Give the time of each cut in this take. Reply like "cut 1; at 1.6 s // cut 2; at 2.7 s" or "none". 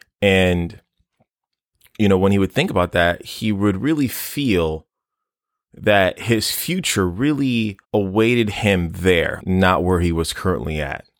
cut 1; at 7.8 s // cut 2; at 9.4 s